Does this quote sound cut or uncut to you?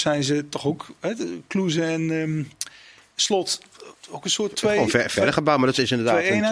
uncut